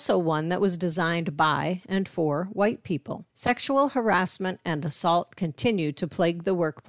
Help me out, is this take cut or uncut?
cut